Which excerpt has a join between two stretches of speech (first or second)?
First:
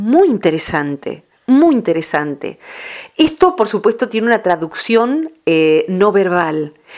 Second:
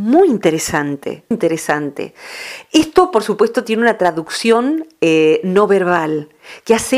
second